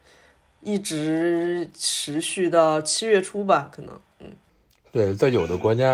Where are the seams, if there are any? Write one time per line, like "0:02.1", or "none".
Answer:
none